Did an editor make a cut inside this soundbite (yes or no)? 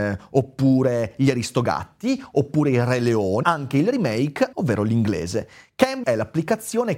yes